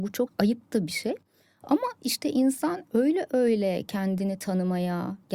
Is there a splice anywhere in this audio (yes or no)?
no